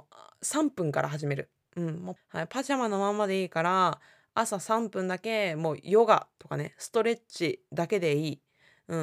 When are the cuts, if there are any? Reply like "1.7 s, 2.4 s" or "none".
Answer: 2.2 s